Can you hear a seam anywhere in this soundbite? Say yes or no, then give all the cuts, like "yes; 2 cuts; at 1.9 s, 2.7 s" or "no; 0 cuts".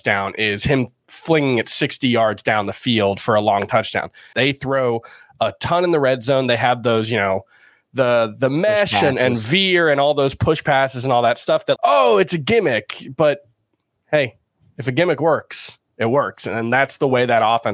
yes; 2 cuts; at 4.3 s, 11.8 s